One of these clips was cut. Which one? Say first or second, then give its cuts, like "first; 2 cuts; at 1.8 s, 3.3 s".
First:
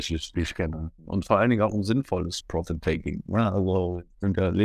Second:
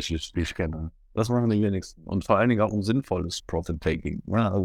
first; 1 cut; at 1.0 s